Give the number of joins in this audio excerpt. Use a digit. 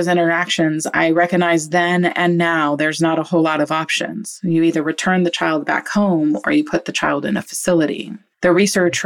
0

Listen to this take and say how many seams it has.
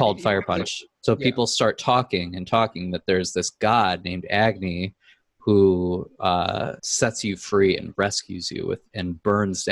2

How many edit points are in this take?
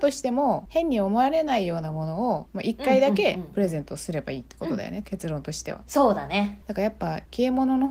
0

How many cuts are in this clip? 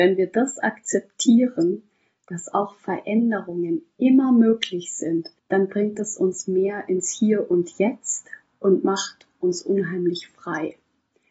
1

